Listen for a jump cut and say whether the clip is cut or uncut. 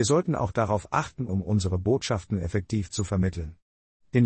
cut